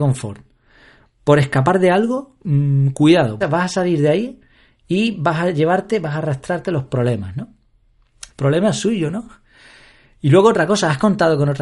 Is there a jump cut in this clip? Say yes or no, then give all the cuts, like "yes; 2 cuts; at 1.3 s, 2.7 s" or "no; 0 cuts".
yes; 2 cuts; at 3.4 s, 8.3 s